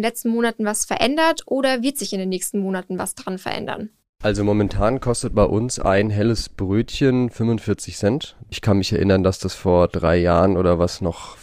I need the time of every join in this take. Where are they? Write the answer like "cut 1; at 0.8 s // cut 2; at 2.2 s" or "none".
cut 1; at 8.5 s